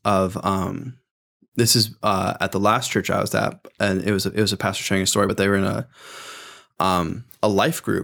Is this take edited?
no; 0 cuts

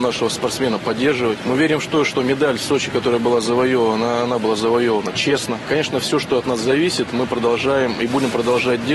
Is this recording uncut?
no; 1 cut; at 5.7 s

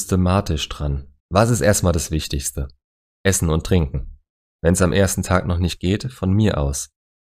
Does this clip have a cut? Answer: yes; 1 cut; at 1.2 s

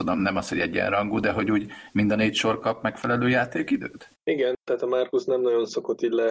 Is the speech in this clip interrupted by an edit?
no; 0 cuts

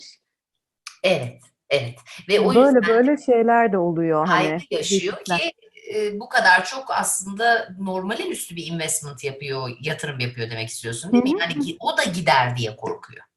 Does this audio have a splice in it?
no; 0 cuts

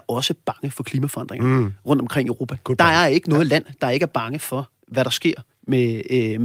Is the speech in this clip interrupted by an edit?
no; 0 cuts

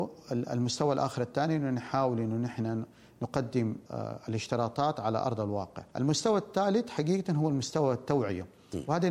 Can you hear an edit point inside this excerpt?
yes; 2 cuts; at 3.9 s, 5.9 s

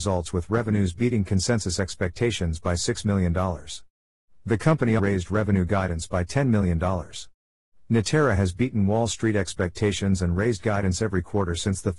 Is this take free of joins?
no; 1 cut; at 5.0 s

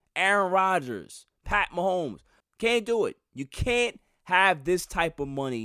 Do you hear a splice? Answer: yes; 1 cut; at 2.4 s

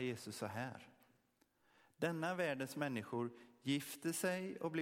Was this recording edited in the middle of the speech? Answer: no; 0 cuts

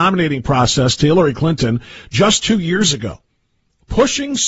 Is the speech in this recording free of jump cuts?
yes; 0 cuts

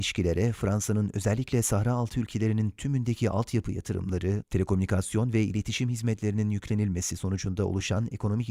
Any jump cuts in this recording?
yes; 1 cut; at 4.4 s

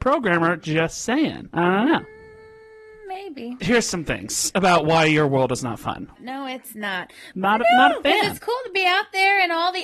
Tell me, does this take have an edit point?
yes; 2 cuts; at 6.2 s, 7.3 s

